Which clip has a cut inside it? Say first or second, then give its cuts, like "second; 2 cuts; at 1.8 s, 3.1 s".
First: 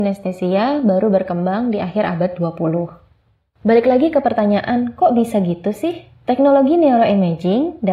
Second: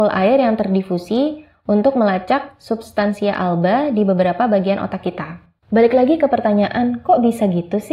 second; 1 cut; at 5.6 s